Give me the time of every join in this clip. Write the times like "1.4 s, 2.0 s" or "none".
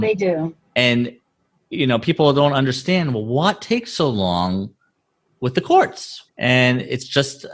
6.3 s